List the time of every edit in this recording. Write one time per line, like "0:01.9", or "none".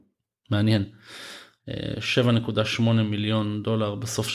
0:01.6